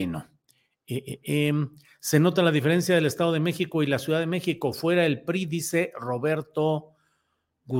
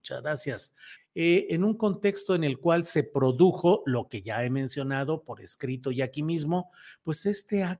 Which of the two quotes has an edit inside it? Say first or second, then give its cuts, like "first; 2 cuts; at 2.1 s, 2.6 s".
second; 1 cut; at 1.0 s